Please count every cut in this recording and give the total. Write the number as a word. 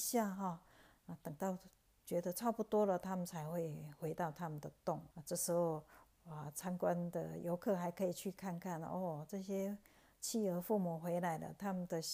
one